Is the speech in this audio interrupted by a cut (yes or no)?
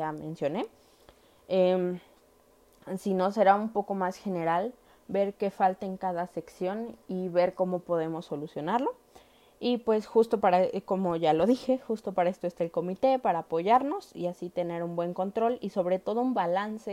no